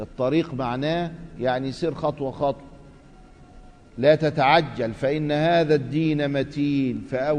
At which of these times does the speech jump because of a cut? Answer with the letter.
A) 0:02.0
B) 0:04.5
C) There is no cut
C